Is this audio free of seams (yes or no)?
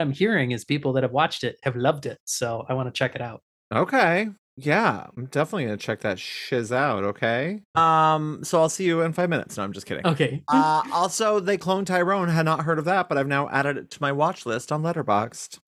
no